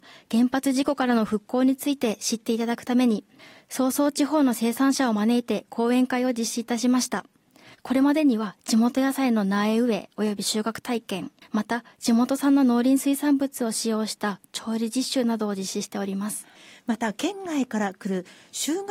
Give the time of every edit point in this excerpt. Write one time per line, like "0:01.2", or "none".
0:07.7